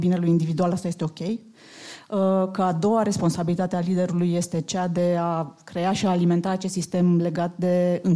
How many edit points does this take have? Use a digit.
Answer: 0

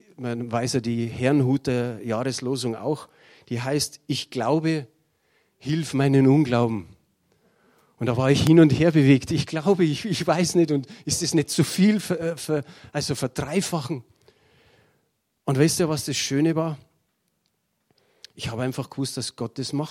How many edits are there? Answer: 0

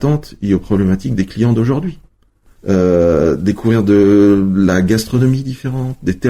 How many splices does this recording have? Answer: 1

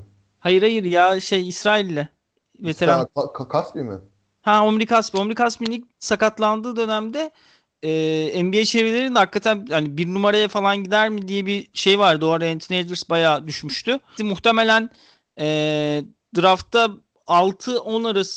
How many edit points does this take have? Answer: 1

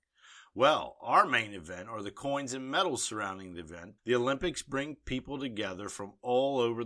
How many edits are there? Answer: 1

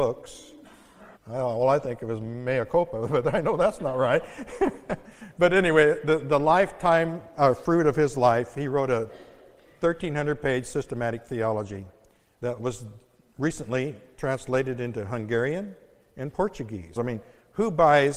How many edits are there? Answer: 2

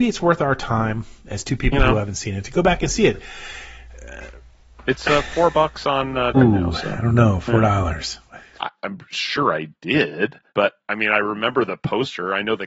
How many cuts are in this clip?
3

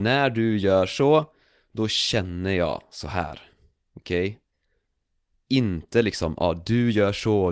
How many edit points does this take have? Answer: 0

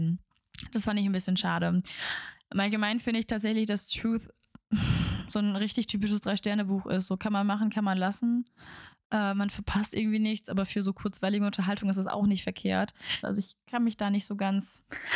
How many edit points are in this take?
1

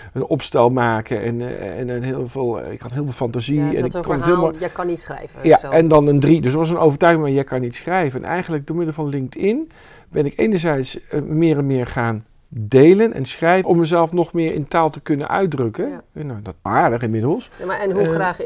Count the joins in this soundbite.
2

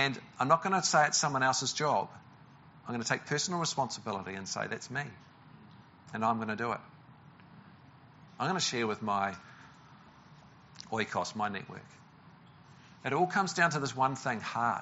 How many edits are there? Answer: 1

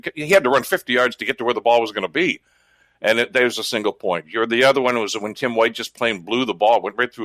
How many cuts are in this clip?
0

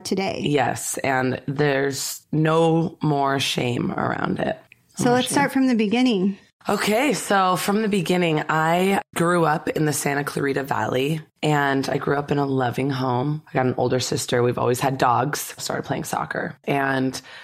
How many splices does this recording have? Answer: 2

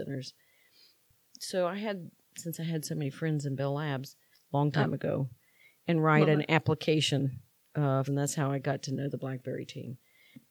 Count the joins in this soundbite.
2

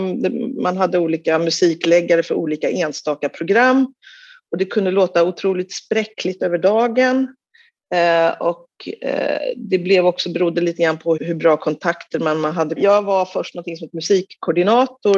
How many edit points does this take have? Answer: 2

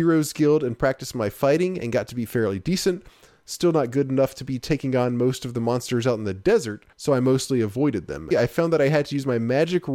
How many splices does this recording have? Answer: 2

